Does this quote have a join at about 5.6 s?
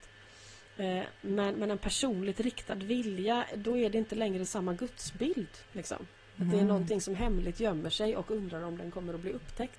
yes; 1 cut; at 5.6 s

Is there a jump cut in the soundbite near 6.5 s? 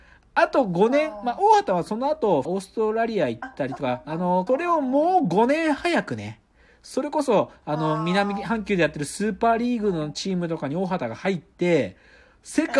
no; 2 cuts; at 2.4 s, 4.5 s

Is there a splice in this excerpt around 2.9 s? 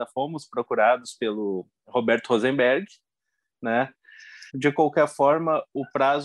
no; 1 cut; at 4.5 s

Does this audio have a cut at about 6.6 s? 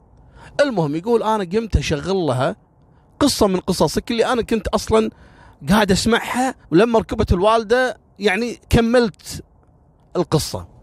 yes; 2 cuts; at 6.6 s, 8.6 s

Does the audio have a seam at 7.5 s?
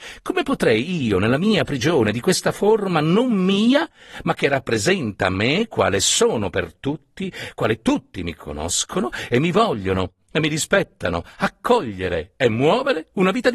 no; 0 cuts

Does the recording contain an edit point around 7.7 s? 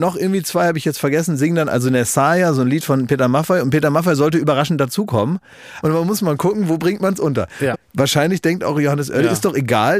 yes; 2 cuts; at 5.8 s, 7.7 s

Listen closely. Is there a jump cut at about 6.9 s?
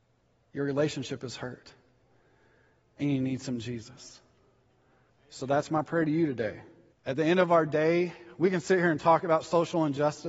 yes; 2 cuts; at 5.1 s, 6.9 s

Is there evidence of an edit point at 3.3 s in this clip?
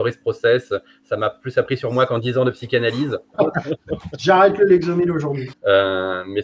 yes; 2 cuts; at 3.3 s, 5.5 s

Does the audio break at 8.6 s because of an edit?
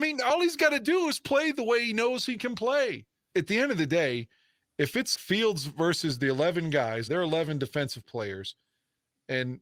no; 3 cuts; at 3.3 s, 5.1 s, 7.1 s

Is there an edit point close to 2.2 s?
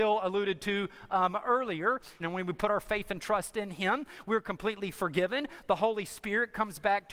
yes; 1 cut; at 2.2 s

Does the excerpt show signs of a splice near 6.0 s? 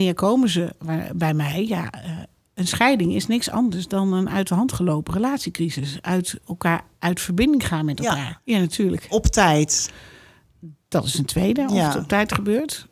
no; 1 cut; at 8.4 s

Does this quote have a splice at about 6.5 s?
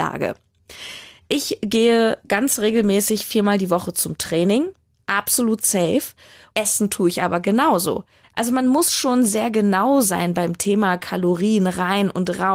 yes; 3 cuts; at 1.2 s, 6.5 s, 8.2 s

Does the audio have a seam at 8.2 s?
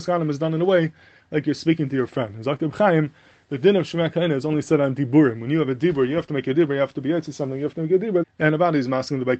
yes; 1 cut; at 8.2 s

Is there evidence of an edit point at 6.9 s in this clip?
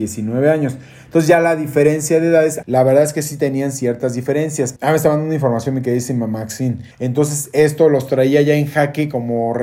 yes; 3 cuts; at 2.6 s, 4.8 s, 6.9 s

